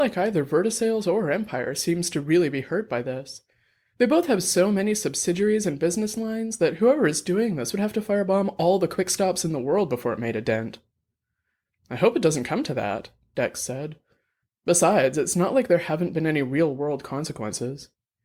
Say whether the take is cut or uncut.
uncut